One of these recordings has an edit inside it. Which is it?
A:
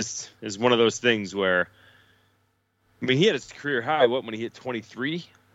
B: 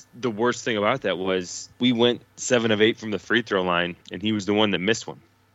B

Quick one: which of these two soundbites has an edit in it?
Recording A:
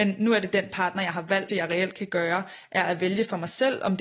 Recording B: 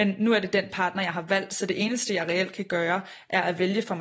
A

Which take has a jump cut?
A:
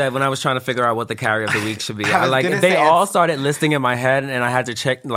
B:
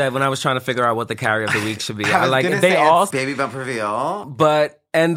B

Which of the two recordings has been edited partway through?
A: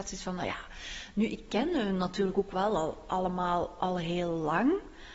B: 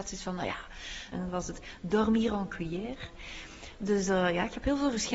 B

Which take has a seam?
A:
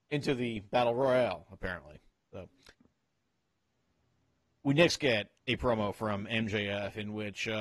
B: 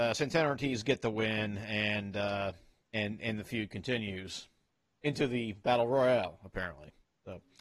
A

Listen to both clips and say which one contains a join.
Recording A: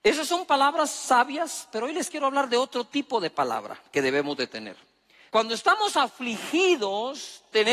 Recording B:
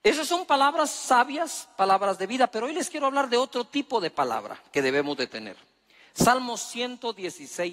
A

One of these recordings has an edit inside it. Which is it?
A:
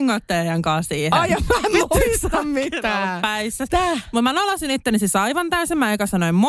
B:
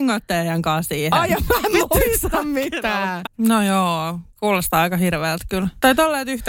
B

